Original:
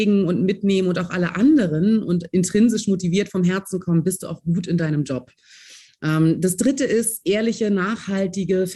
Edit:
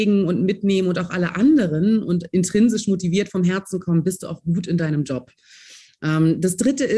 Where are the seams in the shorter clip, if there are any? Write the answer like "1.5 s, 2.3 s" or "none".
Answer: none